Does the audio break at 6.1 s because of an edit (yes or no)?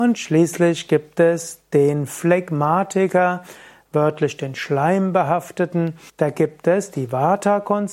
yes